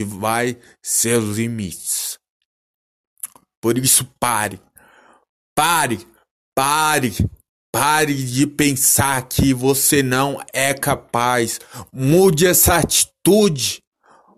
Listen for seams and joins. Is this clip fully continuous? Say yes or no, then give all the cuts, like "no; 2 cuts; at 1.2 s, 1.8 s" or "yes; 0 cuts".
yes; 0 cuts